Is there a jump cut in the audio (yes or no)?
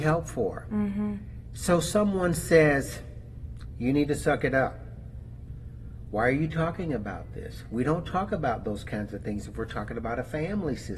no